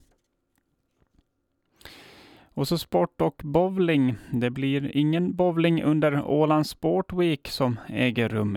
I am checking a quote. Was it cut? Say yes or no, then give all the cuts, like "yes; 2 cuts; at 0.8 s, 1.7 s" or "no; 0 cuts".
no; 0 cuts